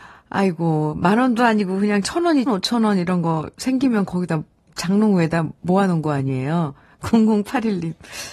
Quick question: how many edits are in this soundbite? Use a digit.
1